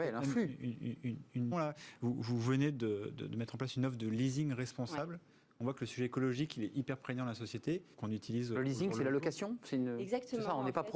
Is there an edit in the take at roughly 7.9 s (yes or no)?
yes